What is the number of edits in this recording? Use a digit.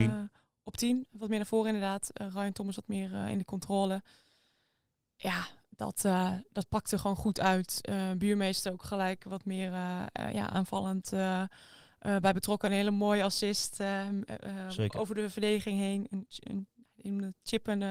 1